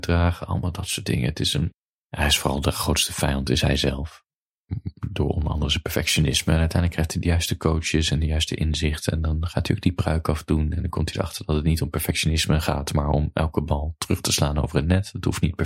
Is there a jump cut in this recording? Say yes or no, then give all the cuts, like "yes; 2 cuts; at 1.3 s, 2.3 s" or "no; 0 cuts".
no; 0 cuts